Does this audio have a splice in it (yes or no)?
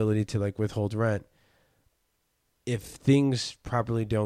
no